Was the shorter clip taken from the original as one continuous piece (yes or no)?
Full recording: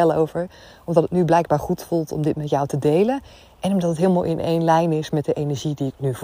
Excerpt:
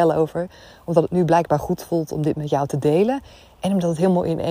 yes